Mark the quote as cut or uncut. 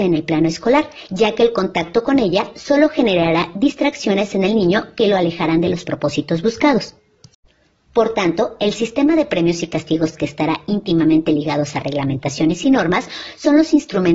cut